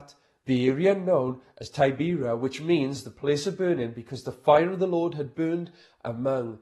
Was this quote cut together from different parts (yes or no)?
no